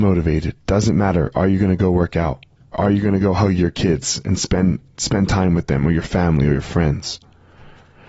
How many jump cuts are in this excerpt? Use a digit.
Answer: 1